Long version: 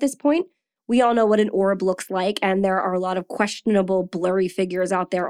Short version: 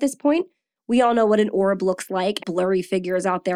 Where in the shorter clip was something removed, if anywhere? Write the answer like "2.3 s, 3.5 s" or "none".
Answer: 2.4 s